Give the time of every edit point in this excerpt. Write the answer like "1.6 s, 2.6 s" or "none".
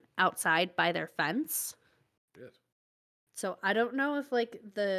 2.3 s